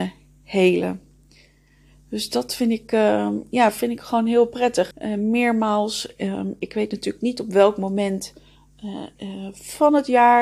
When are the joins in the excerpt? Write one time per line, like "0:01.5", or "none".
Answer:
0:04.9